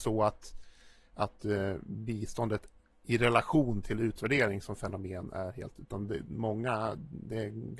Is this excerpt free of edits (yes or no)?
yes